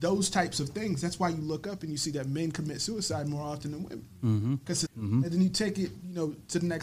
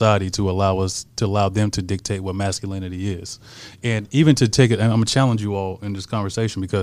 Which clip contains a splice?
first; 1 cut; at 4.9 s

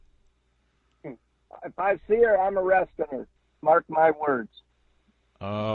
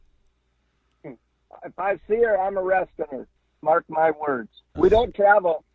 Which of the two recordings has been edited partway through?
second; 1 cut; at 4.7 s

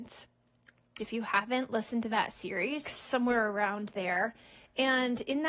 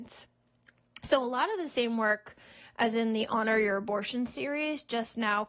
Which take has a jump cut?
first; 2 cuts; at 1.0 s, 2.9 s

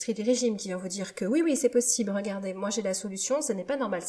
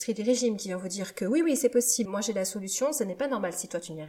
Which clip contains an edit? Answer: second; 1 cut; at 2.1 s

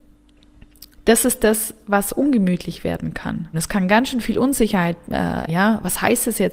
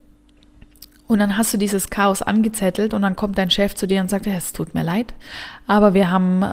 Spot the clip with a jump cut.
first; 3 cuts; at 0.9 s, 3.5 s, 5.5 s

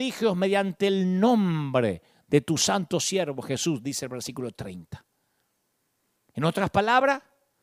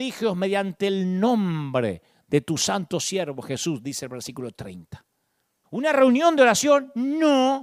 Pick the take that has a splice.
second; 1 cut; at 5.6 s

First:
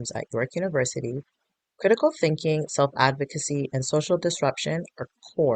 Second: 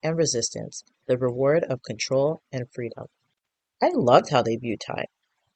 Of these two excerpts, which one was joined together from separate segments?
second; 2 cuts; at 0.9 s, 3.7 s

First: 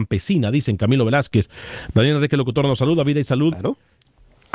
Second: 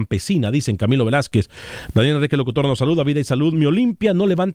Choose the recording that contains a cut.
first; 1 cut; at 3.5 s

